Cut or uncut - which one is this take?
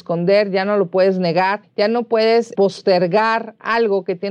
cut